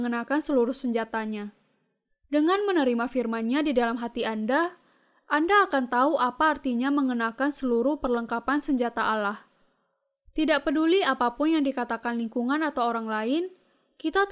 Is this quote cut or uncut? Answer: uncut